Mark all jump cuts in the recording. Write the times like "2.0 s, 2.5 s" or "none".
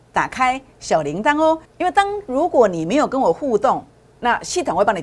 1.6 s